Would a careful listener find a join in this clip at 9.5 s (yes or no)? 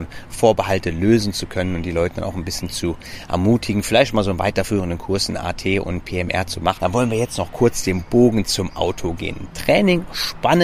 no